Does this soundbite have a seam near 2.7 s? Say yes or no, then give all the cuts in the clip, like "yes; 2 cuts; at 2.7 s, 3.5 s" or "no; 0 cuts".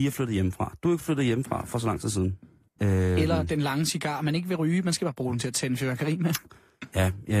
yes; 1 cut; at 2.7 s